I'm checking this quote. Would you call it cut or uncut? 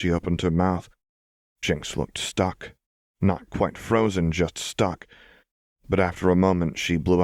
cut